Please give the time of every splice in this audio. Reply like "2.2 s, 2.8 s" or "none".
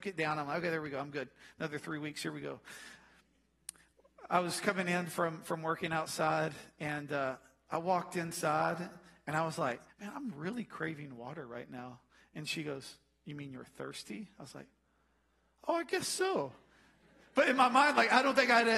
9.9 s